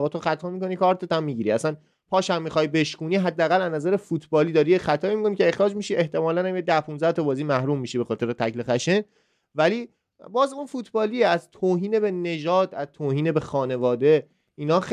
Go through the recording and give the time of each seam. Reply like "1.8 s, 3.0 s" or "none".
none